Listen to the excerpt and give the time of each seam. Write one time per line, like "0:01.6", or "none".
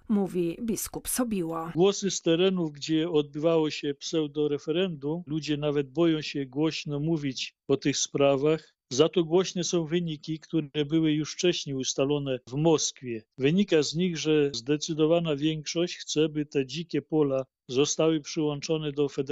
0:05.3